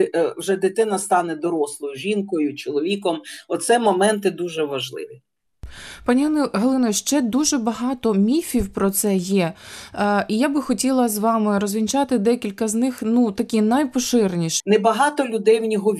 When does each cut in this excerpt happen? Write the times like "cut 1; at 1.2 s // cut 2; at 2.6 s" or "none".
cut 1; at 14.6 s